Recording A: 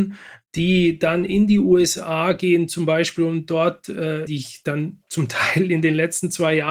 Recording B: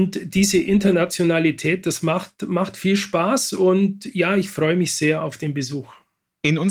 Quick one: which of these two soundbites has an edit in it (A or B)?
A